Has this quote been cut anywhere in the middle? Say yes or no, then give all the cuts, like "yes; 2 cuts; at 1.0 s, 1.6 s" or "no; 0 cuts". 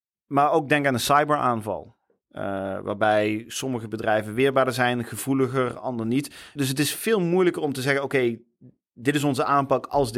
yes; 1 cut; at 6.6 s